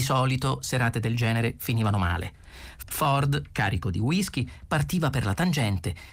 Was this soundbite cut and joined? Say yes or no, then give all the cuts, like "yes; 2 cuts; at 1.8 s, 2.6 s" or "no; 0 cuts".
no; 0 cuts